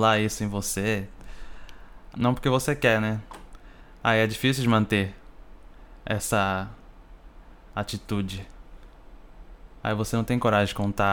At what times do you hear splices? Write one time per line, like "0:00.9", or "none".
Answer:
0:02.1
0:09.8